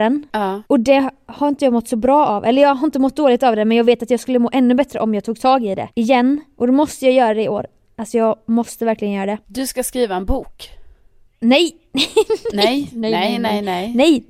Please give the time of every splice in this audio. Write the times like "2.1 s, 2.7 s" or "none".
none